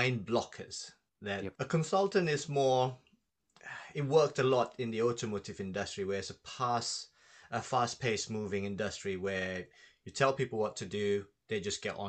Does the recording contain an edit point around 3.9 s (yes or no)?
no